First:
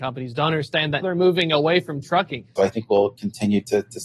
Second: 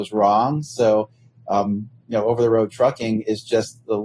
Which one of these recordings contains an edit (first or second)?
first